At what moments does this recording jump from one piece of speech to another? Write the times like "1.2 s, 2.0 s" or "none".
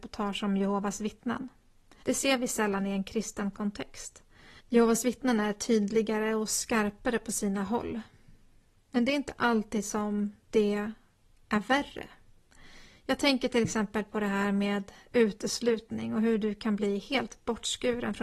2.0 s, 4.6 s